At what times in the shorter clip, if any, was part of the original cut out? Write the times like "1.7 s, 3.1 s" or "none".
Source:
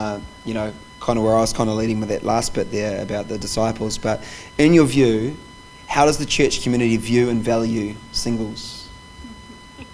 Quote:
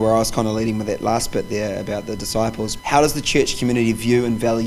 2.8 s